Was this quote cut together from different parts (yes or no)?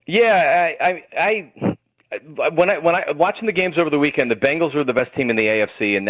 no